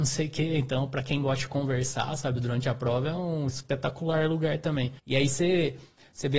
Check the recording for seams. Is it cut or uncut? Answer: cut